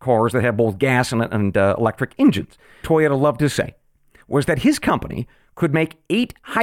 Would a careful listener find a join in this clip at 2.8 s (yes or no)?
yes